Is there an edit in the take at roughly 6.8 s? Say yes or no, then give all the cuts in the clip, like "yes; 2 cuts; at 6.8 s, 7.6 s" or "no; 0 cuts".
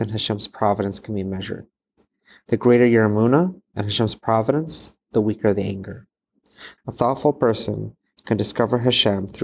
yes; 1 cut; at 6.8 s